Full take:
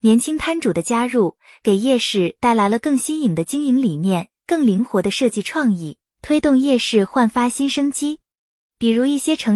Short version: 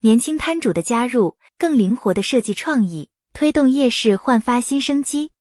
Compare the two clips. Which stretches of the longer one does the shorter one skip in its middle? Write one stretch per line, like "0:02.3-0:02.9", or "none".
0:01.5-0:04.4